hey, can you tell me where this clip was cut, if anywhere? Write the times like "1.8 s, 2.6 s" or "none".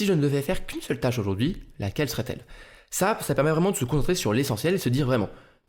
none